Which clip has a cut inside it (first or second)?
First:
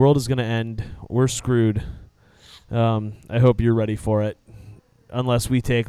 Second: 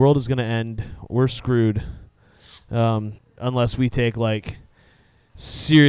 second